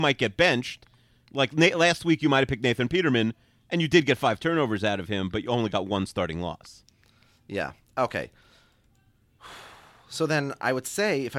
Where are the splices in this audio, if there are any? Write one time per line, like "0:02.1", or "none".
none